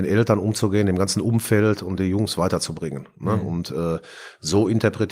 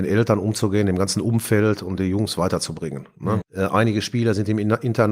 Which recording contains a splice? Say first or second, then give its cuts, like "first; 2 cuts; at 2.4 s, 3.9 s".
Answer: second; 1 cut; at 3.4 s